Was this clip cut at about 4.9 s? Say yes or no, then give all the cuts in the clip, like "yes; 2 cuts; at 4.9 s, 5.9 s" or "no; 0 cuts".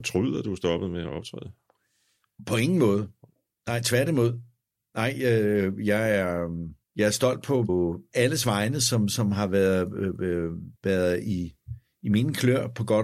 no; 2 cuts; at 6.8 s, 10.8 s